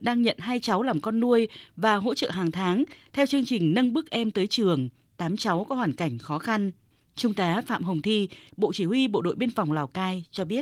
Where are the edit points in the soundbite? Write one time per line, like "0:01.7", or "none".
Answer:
0:08.5